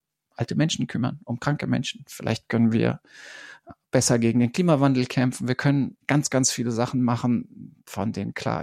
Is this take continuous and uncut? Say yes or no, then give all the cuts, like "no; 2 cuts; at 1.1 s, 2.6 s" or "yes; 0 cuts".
yes; 0 cuts